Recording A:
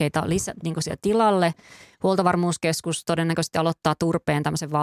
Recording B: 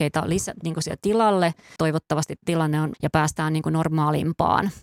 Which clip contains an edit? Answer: B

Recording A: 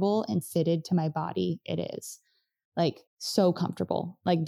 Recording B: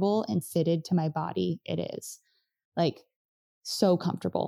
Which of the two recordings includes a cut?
A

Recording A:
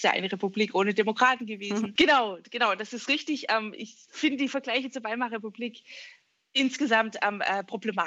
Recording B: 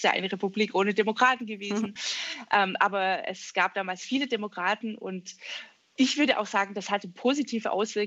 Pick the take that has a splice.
A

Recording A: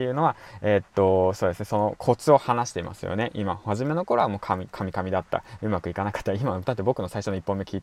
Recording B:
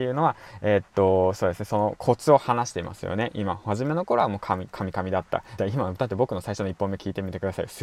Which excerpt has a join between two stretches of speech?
B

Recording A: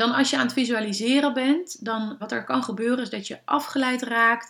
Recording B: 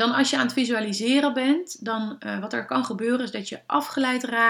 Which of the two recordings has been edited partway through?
A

